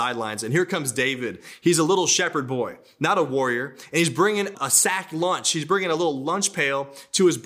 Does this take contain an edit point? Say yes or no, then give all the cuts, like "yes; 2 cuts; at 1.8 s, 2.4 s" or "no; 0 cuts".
yes; 1 cut; at 4.5 s